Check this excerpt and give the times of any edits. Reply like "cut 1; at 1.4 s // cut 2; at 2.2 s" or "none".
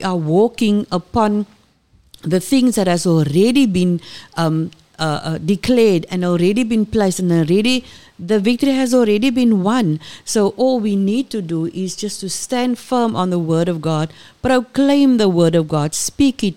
none